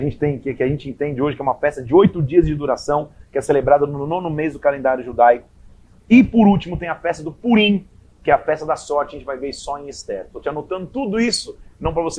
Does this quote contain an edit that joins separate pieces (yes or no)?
no